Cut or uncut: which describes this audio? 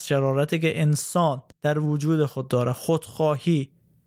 cut